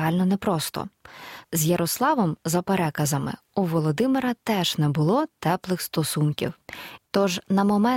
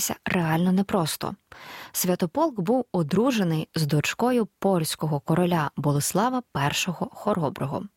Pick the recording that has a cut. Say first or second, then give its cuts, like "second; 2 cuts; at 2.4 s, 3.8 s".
first; 2 cuts; at 1.4 s, 7.0 s